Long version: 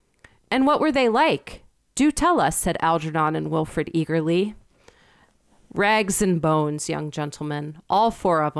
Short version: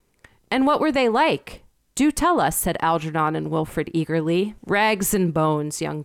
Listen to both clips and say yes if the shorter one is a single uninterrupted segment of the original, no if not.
no